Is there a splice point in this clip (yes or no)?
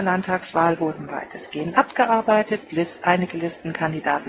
no